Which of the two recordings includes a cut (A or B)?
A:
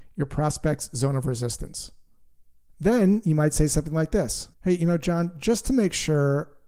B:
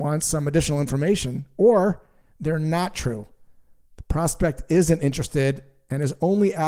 A